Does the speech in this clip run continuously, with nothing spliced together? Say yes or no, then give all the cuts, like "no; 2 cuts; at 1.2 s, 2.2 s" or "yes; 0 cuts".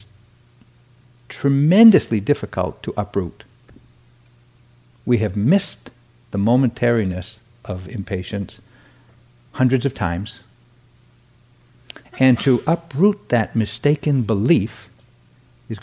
no; 1 cut; at 12.0 s